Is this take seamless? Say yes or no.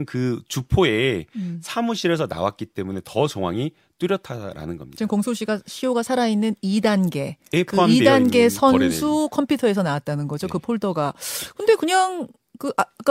yes